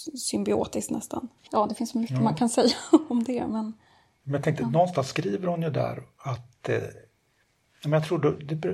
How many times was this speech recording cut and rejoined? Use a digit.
1